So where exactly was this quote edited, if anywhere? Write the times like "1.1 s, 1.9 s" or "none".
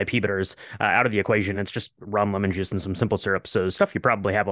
none